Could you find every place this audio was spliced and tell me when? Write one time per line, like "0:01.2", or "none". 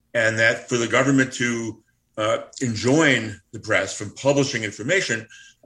none

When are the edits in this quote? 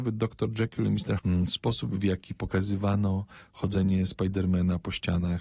0:01.2

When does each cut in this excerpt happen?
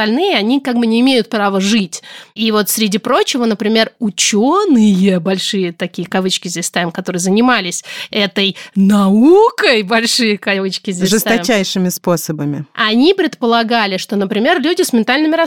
none

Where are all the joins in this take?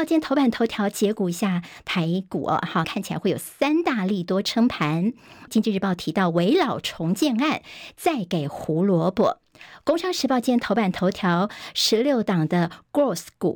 0:02.8
0:05.5

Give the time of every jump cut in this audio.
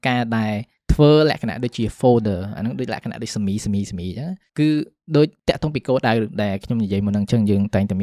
none

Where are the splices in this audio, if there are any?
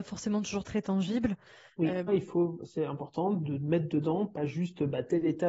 0:02.1

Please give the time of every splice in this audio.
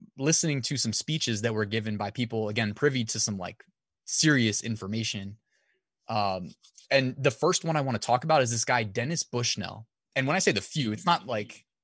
0:10.1

